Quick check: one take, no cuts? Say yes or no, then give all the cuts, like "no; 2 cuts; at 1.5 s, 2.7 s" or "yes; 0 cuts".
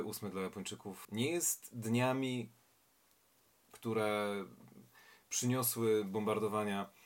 no; 1 cut; at 1.0 s